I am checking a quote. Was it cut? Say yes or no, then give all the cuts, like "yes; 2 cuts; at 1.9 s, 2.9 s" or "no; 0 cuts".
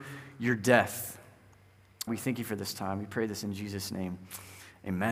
yes; 1 cut; at 2.1 s